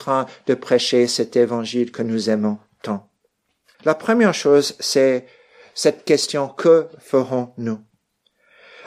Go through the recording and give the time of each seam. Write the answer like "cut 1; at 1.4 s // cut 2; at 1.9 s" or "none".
cut 1; at 3.7 s